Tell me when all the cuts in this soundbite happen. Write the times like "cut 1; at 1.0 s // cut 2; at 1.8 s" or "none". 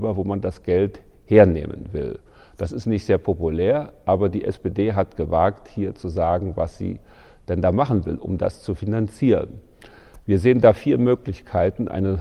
none